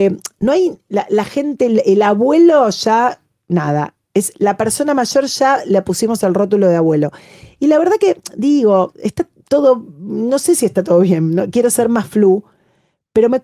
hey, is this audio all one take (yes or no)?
no